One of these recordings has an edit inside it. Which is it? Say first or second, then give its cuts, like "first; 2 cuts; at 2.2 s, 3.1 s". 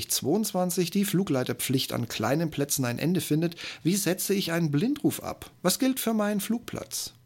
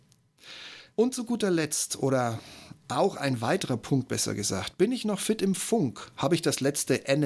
second; 1 cut; at 0.9 s